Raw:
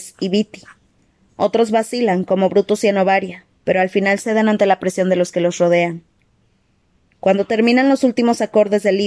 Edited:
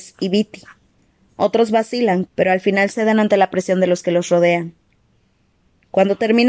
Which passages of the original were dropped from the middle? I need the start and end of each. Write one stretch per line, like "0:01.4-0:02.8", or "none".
0:02.2-0:03.5